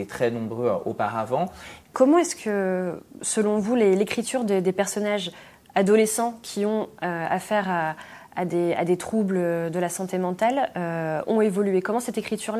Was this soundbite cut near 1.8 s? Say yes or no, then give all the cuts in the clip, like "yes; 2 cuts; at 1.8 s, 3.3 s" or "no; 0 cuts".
yes; 1 cut; at 1.8 s